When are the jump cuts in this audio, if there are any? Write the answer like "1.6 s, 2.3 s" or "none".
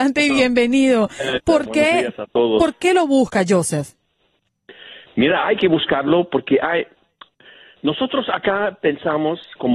1.3 s